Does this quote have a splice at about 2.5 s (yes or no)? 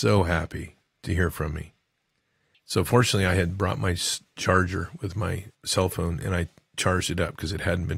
yes